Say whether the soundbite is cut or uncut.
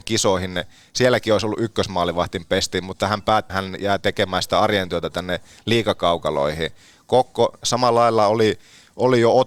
cut